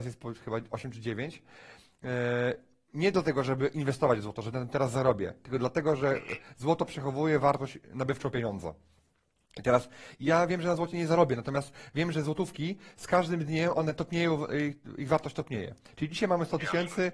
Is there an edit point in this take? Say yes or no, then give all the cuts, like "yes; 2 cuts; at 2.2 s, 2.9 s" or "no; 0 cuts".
no; 0 cuts